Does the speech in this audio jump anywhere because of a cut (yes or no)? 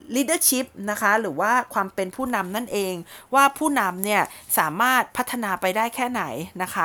no